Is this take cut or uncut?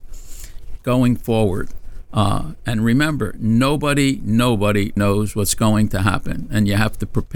cut